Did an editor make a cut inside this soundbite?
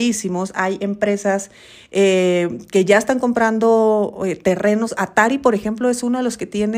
no; 0 cuts

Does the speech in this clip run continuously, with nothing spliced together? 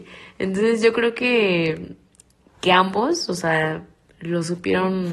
yes; 0 cuts

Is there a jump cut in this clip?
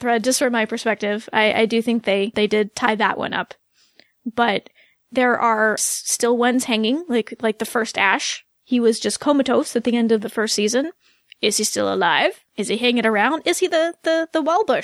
yes; 2 cuts; at 2.3 s, 5.8 s

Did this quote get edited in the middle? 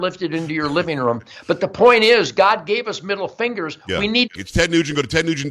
yes; 1 cut; at 4.4 s

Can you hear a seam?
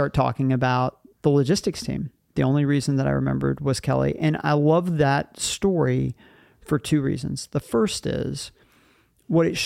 yes; 1 cut; at 2.3 s

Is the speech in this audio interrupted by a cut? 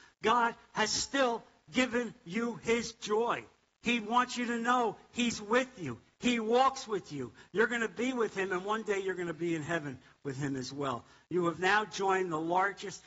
yes; 1 cut; at 3.8 s

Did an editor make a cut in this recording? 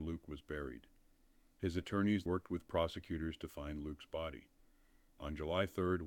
yes; 1 cut; at 2.3 s

